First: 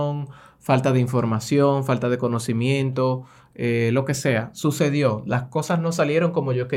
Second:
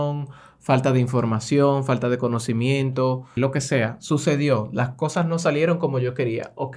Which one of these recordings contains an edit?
second; 1 cut; at 3.4 s

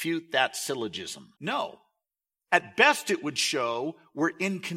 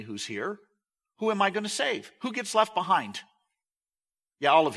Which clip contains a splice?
first; 1 cut; at 1.3 s

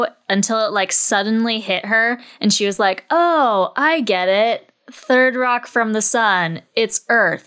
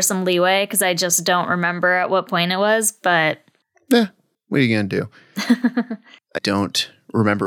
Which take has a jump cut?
second; 1 cut; at 6.3 s

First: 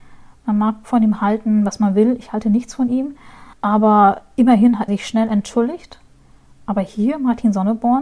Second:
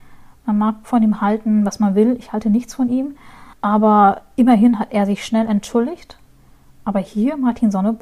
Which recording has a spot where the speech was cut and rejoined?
first; 1 cut; at 4.9 s

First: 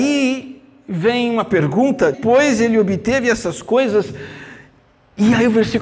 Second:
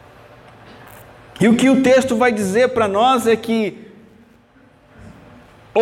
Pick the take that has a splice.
first; 1 cut; at 2.1 s

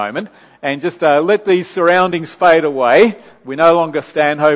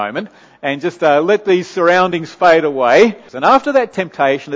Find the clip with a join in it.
second; 1 cut; at 3.3 s

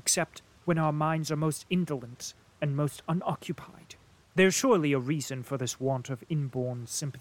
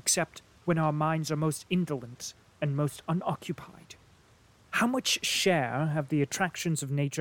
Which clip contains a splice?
first; 1 cut; at 4.2 s

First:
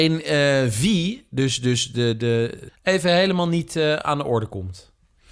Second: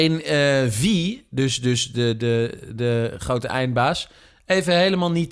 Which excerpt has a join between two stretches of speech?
first; 1 cut; at 2.7 s

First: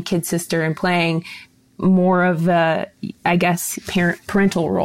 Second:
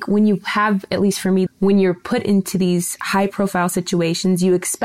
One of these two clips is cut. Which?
second; 1 cut; at 1.5 s

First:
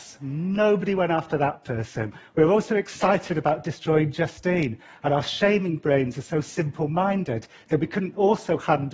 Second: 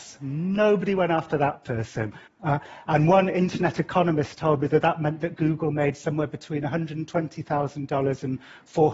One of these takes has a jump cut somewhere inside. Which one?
second; 1 cut; at 2.3 s

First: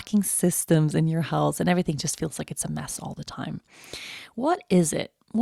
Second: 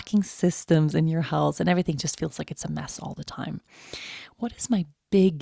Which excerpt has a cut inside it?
second; 1 cut; at 4.3 s

